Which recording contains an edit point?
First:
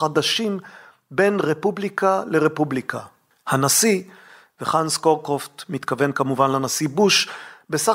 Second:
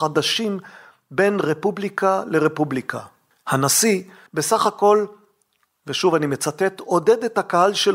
second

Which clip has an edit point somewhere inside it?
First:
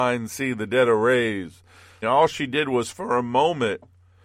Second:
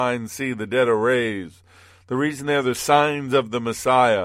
first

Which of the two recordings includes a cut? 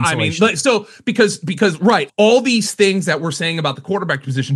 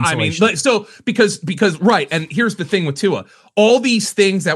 first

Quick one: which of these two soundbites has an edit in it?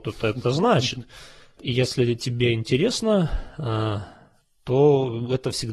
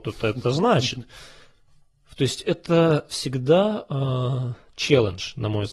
first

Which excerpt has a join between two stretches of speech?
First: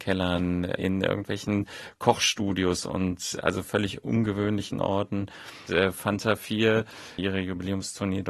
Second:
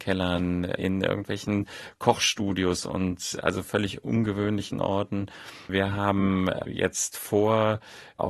first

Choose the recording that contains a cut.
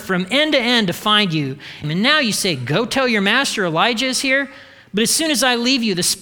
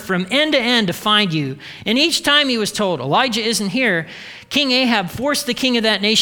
first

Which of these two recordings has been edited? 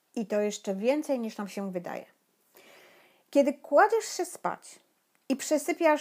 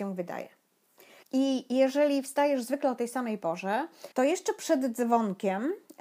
second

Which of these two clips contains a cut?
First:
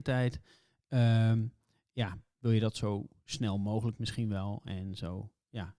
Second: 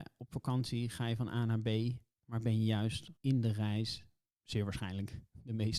second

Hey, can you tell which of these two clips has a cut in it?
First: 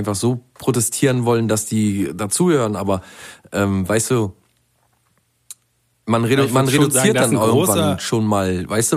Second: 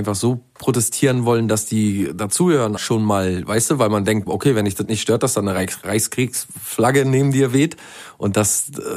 second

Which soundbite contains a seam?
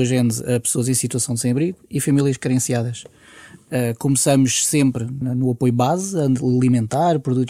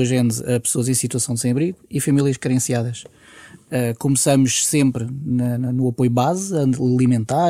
first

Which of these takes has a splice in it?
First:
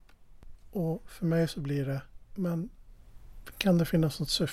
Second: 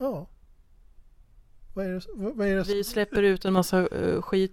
first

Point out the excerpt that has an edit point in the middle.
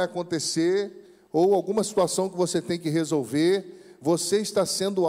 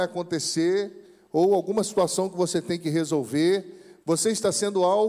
second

